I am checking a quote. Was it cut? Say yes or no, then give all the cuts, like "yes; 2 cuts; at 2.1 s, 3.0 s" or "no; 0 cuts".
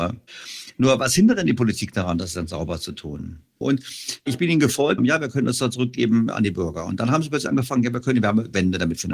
yes; 2 cuts; at 3.6 s, 5.0 s